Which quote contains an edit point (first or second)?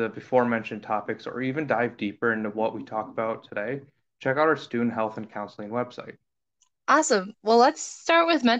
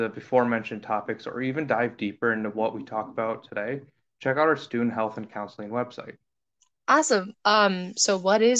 second